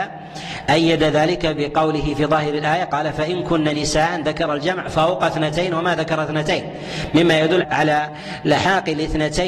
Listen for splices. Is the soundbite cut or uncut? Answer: cut